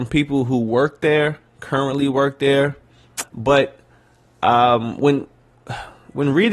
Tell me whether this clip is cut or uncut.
cut